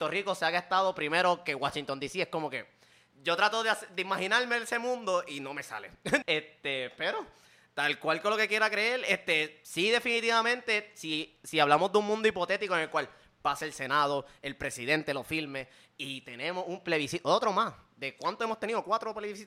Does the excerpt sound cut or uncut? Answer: cut